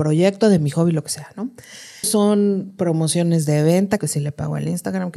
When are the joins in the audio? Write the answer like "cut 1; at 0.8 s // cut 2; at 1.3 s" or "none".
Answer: cut 1; at 2.0 s // cut 2; at 4.0 s